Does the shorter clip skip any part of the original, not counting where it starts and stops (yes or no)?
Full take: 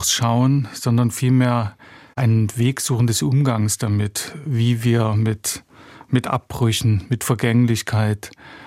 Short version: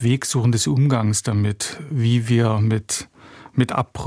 no